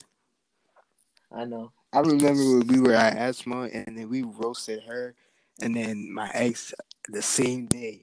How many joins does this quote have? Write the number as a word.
one